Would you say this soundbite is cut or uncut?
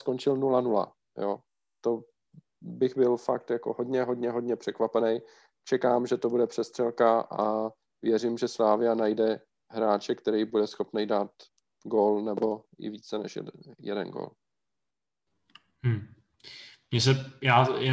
uncut